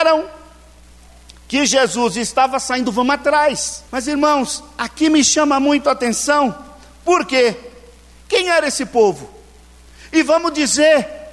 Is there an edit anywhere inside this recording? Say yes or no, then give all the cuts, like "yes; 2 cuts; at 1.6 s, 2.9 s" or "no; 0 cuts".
yes; 1 cut; at 3.9 s